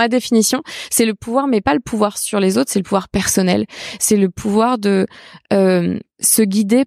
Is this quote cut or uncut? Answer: uncut